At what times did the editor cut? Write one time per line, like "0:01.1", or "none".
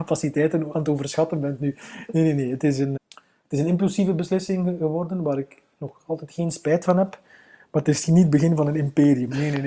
0:03.0